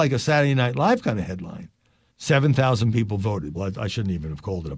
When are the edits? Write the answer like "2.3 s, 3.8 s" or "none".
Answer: 2.1 s, 3.5 s

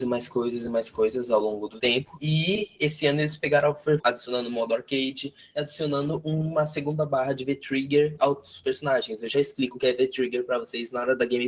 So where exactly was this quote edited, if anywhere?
4.0 s

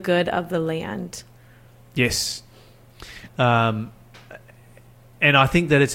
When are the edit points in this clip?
3.3 s

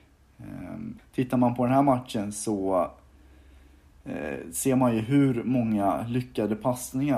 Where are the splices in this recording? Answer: 1.0 s

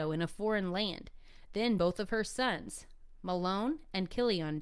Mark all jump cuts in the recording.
none

